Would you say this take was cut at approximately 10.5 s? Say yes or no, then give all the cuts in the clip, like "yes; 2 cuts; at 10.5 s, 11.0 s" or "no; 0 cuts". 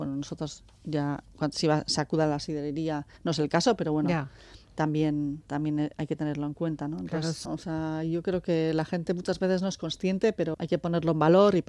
yes; 2 cuts; at 7.5 s, 10.5 s